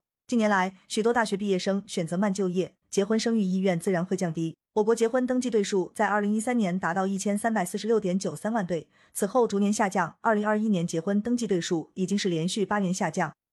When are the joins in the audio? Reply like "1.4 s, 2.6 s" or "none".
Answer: 2.8 s, 4.7 s